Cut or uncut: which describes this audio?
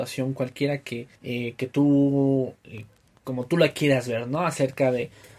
cut